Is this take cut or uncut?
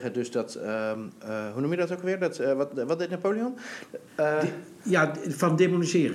cut